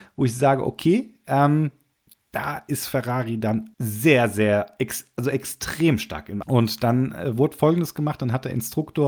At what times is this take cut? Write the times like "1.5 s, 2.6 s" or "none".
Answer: 3.7 s, 6.4 s